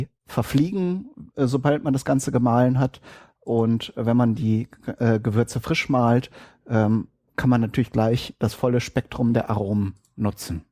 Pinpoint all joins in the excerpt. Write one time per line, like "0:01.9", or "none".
none